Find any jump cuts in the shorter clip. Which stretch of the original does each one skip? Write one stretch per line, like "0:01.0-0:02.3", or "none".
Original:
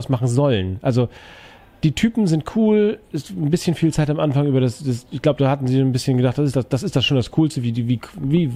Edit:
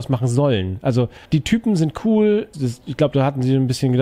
0:01.2-0:01.8
0:03.0-0:04.8